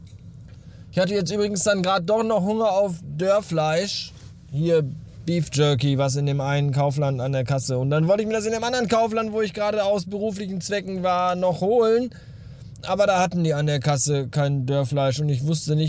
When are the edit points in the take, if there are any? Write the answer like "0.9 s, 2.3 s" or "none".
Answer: none